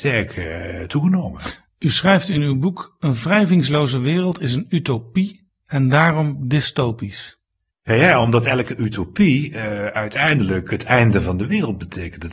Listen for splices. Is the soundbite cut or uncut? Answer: uncut